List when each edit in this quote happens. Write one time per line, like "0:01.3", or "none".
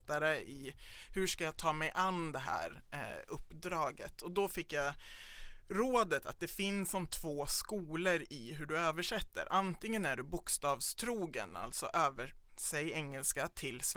0:12.5